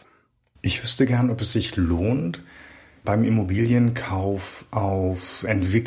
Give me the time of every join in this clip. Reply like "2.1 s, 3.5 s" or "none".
3.0 s